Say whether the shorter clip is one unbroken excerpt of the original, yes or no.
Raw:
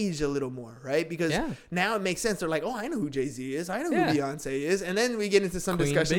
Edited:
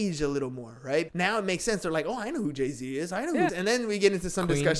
no